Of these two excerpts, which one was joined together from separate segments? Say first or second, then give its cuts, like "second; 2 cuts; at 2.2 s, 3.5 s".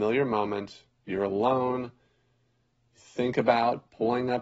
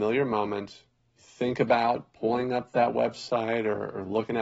second; 1 cut; at 1.0 s